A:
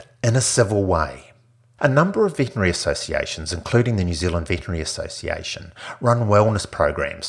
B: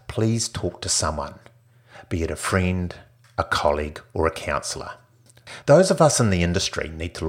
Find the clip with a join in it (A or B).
B